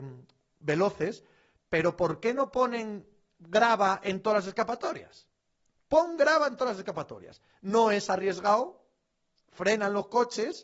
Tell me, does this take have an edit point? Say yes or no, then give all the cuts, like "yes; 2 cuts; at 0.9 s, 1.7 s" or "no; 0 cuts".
no; 0 cuts